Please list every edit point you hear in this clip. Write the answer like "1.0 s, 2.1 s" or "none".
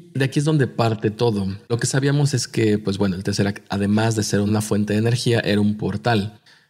1.7 s